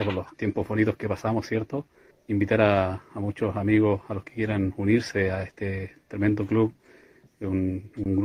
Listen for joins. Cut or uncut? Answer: cut